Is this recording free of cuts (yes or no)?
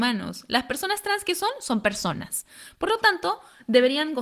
yes